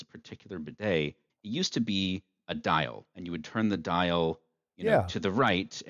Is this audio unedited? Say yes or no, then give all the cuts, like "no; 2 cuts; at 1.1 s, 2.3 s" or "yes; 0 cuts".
no; 1 cut; at 1.3 s